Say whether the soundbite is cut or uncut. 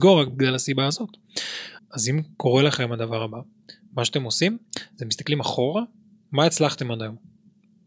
cut